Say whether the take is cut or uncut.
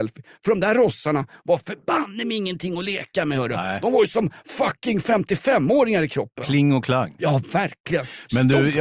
uncut